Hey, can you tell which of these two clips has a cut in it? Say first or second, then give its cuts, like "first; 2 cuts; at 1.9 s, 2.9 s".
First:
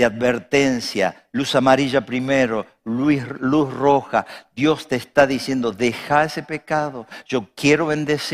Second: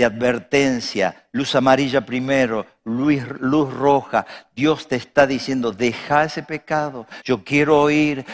second; 1 cut; at 7.2 s